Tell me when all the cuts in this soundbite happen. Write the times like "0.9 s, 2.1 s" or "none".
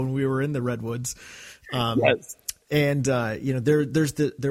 none